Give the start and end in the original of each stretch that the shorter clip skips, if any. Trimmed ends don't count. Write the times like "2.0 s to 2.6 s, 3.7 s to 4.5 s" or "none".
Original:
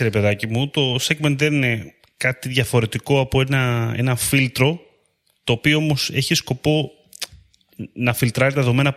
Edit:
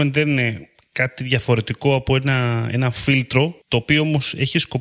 4.9 s to 5.4 s